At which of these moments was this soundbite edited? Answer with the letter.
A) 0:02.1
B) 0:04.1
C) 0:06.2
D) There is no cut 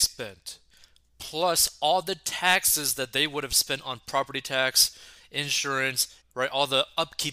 C